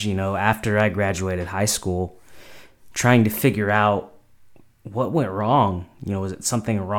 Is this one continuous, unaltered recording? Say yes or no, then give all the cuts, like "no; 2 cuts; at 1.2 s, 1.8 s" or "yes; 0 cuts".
yes; 0 cuts